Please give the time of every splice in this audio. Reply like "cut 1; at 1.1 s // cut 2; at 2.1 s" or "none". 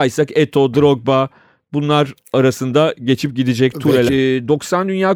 cut 1; at 4.1 s